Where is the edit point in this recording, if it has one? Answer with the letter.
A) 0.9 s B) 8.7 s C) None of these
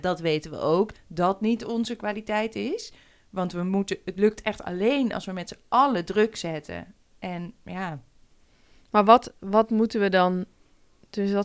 A